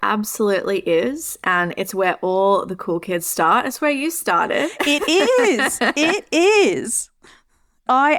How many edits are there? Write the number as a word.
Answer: zero